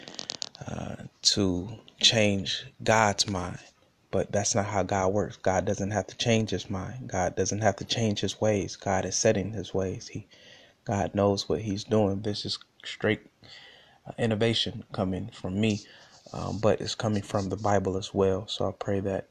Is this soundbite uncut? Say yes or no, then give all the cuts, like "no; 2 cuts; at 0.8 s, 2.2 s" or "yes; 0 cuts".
no; 1 cut; at 12.2 s